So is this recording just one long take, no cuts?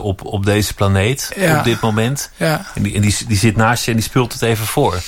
yes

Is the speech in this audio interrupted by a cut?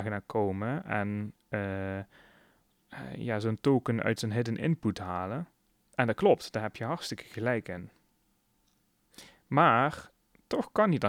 no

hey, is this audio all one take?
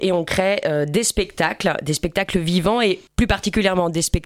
no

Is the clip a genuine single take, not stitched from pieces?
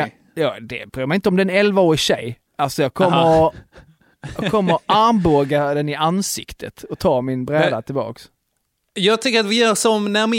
no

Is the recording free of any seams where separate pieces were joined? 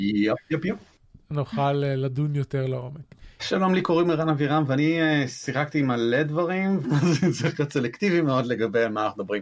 no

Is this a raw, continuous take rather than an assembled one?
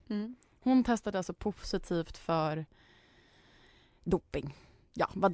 yes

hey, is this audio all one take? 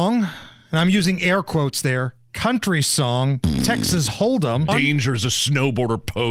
no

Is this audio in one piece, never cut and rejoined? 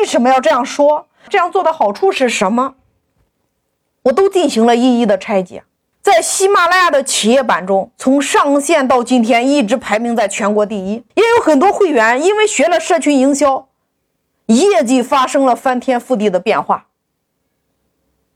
no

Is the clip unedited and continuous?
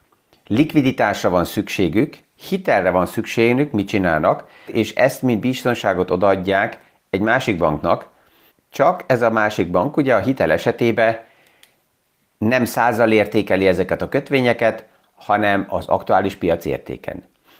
no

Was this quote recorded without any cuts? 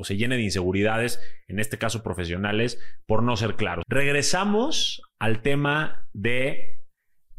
no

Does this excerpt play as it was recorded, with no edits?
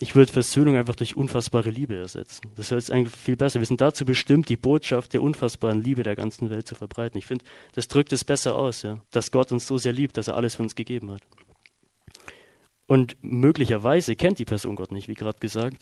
no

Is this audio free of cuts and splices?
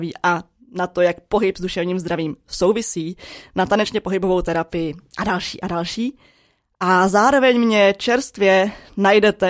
yes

